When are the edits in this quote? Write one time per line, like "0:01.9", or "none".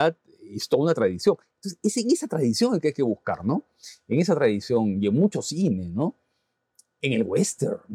none